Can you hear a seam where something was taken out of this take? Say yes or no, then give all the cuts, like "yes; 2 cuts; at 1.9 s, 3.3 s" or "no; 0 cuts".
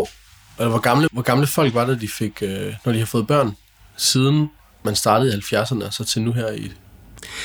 yes; 1 cut; at 1.1 s